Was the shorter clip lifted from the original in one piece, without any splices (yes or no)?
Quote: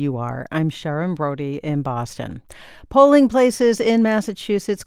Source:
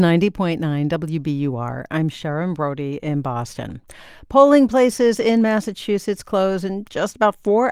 yes